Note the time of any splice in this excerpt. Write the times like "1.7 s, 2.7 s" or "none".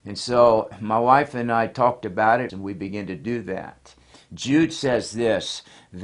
2.5 s, 4.1 s